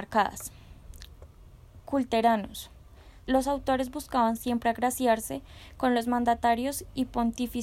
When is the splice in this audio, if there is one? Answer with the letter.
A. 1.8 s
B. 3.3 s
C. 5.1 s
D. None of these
B